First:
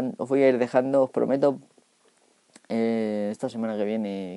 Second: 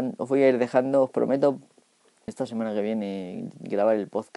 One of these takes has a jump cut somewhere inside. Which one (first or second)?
second